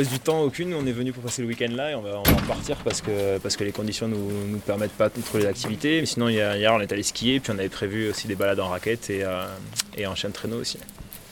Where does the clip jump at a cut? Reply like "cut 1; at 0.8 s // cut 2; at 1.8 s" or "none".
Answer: none